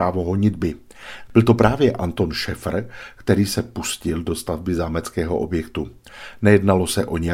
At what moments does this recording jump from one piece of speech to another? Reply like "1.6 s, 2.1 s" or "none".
1.3 s